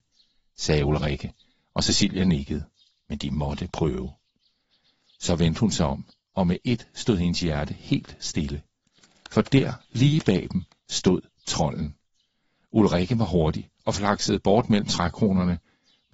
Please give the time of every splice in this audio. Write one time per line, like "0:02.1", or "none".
none